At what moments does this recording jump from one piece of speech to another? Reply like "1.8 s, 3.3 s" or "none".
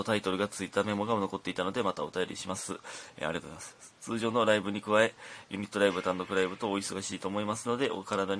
none